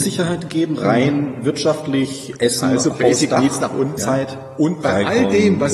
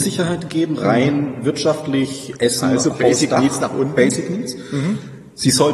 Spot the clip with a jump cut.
first; 1 cut; at 4.0 s

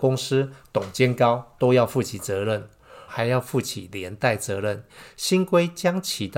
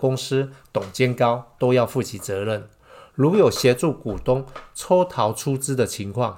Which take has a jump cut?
first; 1 cut; at 3.1 s

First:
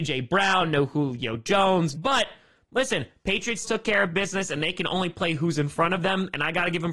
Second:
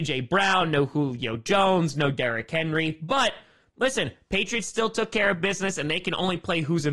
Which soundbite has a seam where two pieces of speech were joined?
first; 2 cuts; at 1.9 s, 3.6 s

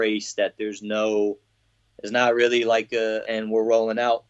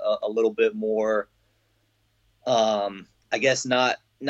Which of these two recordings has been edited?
first; 1 cut; at 3.2 s

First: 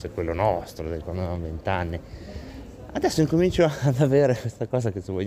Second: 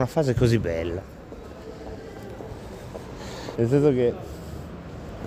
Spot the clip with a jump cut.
second; 1 cut; at 3.6 s

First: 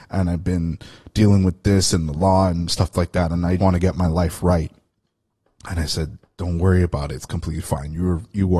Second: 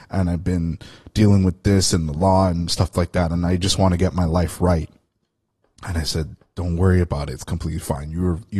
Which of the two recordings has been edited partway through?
first; 1 cut; at 3.6 s

